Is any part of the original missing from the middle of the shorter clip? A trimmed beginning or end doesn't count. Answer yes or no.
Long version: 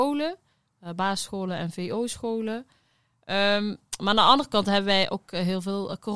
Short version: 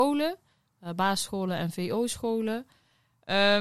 no